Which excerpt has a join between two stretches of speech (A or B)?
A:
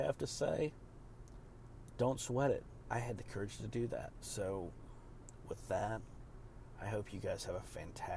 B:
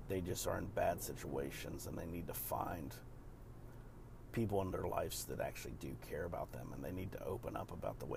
A